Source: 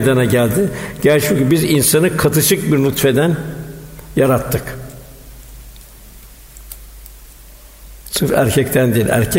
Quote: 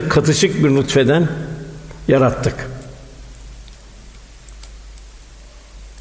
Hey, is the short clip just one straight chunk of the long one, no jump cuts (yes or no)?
yes